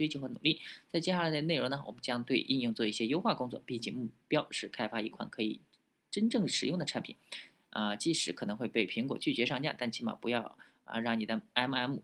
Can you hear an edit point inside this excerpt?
no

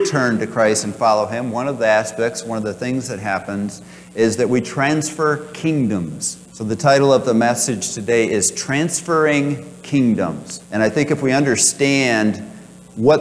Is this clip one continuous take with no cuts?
no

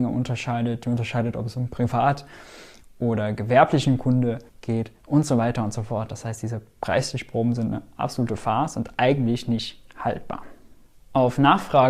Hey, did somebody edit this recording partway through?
yes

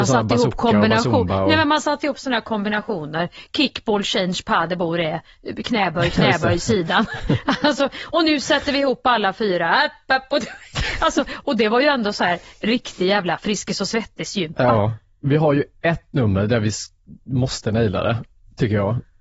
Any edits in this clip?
no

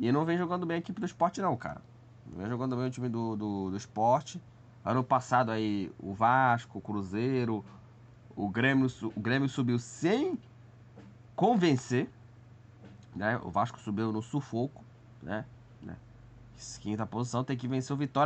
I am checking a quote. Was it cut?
yes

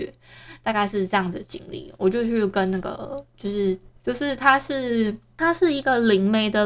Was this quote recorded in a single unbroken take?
no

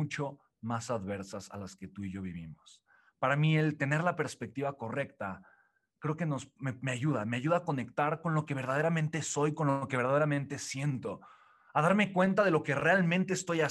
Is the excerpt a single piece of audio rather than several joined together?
yes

